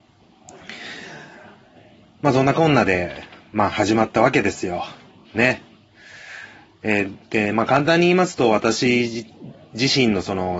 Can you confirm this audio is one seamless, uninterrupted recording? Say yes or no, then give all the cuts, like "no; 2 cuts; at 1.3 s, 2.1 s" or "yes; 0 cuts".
yes; 0 cuts